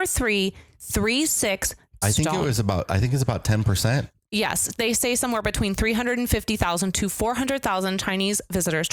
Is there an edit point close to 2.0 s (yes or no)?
yes